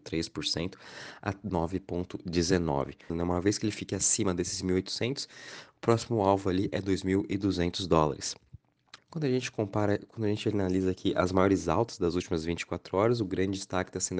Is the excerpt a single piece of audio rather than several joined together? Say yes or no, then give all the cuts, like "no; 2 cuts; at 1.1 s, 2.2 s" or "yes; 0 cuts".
no; 2 cuts; at 3.1 s, 9.0 s